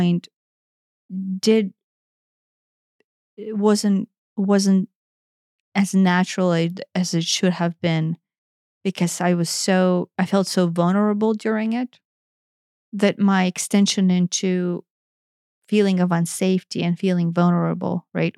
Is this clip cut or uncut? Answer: uncut